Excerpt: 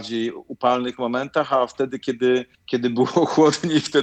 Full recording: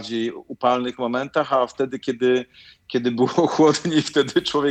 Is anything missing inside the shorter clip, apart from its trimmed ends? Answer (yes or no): yes